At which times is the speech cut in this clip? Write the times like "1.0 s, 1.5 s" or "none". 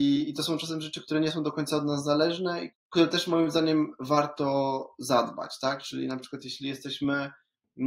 2.7 s